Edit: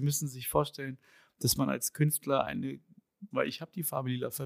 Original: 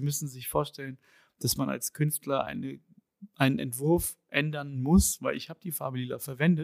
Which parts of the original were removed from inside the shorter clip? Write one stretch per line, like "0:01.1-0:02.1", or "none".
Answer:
0:03.3-0:05.2